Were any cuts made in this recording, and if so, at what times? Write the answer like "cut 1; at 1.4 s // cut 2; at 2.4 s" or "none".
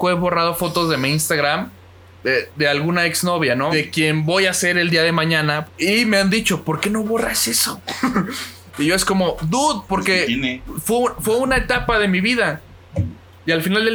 cut 1; at 3.7 s // cut 2; at 5.7 s